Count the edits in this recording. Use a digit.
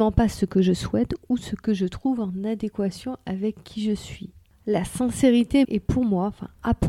1